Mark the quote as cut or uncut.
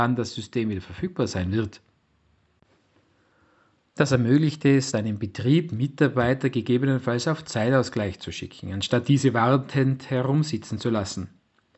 uncut